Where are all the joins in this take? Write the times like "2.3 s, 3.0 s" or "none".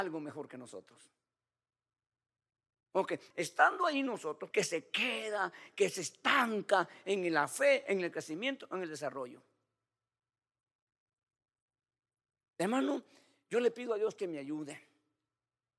3.3 s, 4.5 s